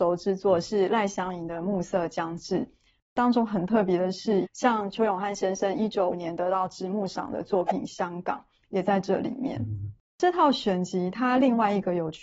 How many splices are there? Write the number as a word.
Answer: two